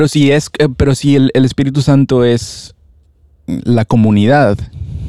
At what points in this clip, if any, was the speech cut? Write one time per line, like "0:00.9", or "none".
none